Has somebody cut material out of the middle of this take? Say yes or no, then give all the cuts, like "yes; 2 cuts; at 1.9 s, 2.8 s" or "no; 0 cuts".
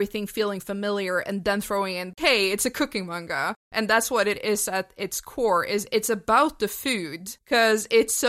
no; 0 cuts